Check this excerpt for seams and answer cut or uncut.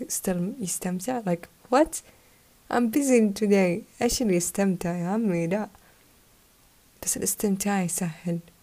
uncut